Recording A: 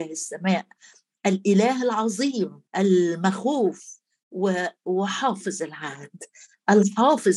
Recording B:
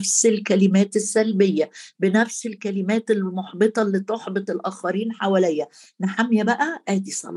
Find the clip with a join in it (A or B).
A